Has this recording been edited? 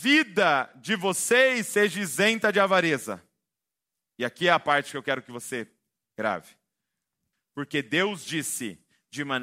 yes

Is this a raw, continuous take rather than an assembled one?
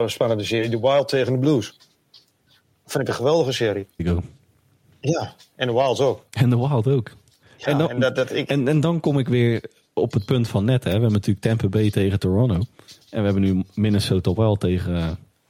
no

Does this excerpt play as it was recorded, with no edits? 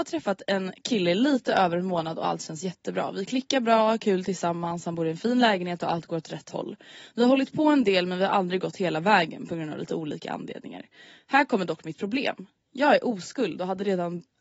yes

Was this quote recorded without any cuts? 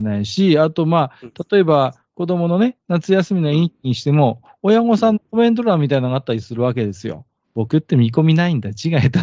no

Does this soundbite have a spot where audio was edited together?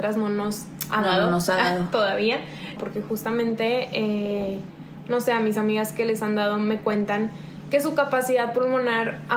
yes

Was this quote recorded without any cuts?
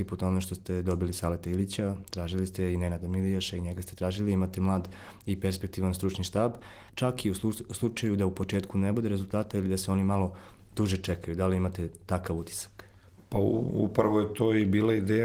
no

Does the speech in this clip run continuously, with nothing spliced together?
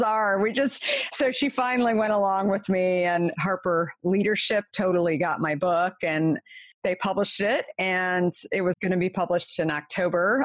no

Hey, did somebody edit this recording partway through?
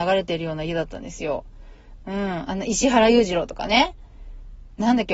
no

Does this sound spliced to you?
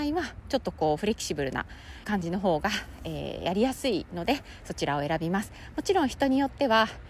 yes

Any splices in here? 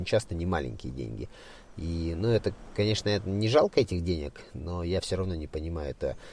no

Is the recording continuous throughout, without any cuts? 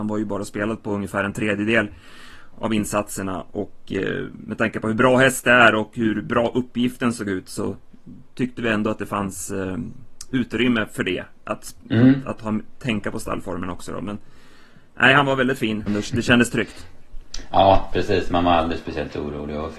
no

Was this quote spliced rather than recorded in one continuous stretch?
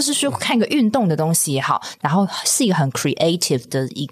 yes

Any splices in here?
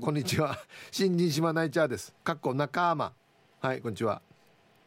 yes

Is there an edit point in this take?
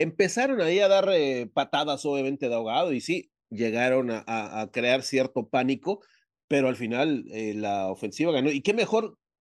no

